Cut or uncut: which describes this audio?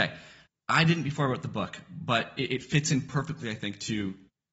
uncut